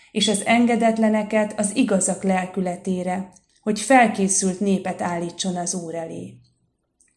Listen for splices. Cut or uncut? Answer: uncut